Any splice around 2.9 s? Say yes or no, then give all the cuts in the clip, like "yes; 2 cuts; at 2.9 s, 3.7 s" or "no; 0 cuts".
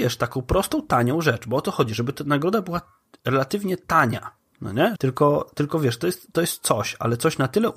no; 1 cut; at 5.0 s